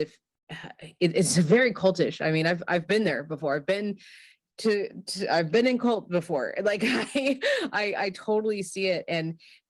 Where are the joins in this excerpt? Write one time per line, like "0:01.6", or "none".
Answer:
none